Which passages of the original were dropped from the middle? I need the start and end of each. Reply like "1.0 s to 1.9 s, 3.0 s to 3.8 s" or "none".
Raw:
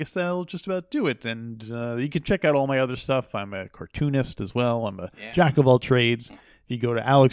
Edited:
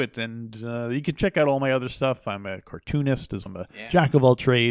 4.5 s to 4.9 s